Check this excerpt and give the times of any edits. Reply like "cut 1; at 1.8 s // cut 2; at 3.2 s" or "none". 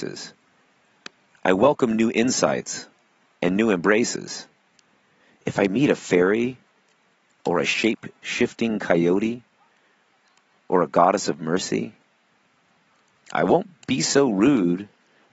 none